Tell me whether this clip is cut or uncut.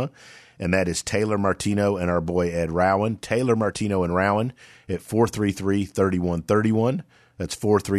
uncut